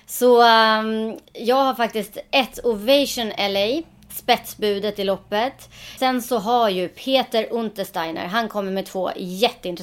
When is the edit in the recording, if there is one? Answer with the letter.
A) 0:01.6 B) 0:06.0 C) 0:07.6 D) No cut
B